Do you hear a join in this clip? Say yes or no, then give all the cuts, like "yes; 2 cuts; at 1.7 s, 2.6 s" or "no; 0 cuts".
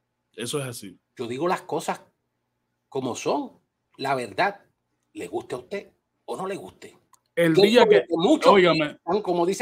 yes; 1 cut; at 1.0 s